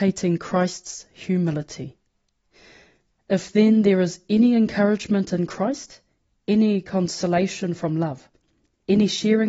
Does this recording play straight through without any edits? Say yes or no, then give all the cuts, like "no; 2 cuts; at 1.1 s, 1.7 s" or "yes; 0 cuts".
yes; 0 cuts